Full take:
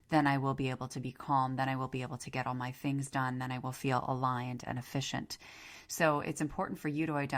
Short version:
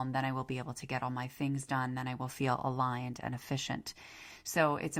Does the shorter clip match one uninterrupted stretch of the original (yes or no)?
yes